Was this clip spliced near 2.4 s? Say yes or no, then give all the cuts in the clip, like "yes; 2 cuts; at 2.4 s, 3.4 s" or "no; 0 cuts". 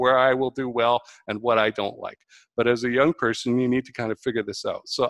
no; 0 cuts